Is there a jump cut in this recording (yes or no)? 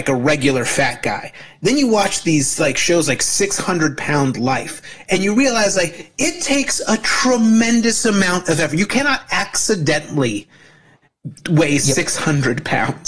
no